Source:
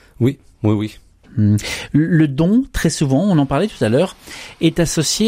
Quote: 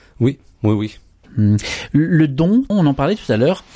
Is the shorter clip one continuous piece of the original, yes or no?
no